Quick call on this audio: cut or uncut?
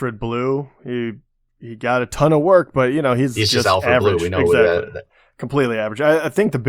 uncut